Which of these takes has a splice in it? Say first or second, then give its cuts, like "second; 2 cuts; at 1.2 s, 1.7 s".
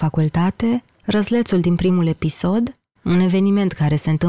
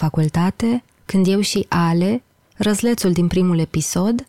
first; 2 cuts; at 0.9 s, 3.0 s